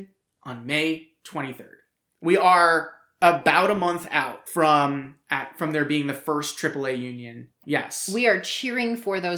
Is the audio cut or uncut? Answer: cut